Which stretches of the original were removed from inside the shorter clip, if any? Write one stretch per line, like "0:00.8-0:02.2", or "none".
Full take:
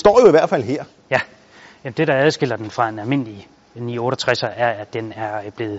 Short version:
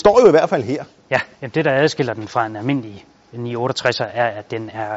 0:01.3-0:01.8